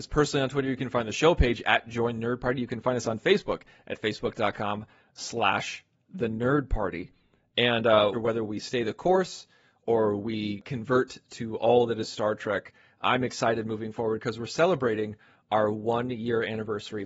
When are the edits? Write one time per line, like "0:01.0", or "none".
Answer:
0:08.1

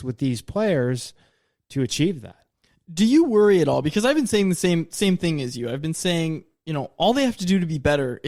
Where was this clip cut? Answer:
none

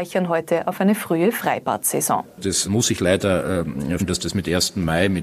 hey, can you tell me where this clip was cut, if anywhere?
0:02.6
0:04.0

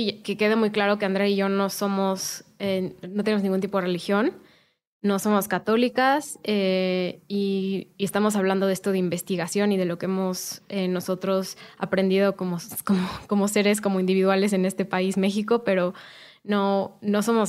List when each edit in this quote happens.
none

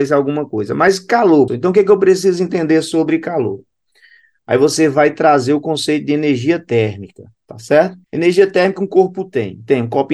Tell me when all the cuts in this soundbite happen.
0:01.5
0:08.0

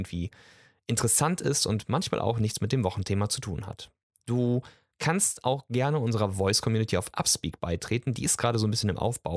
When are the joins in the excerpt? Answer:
none

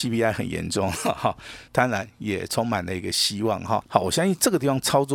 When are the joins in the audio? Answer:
0:01.7
0:03.8

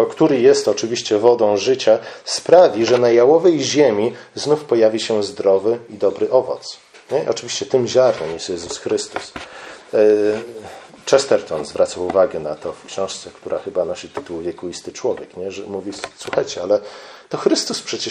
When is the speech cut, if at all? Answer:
none

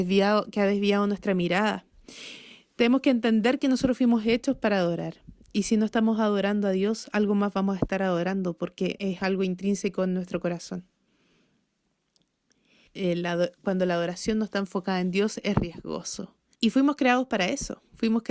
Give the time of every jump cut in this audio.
0:09.0
0:12.9
0:16.5

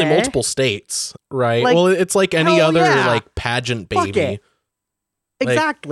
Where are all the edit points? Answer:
0:01.2

